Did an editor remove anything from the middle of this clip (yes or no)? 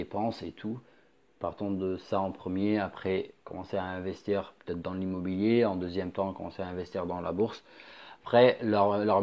no